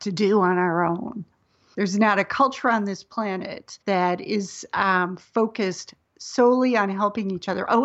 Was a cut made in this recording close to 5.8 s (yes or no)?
no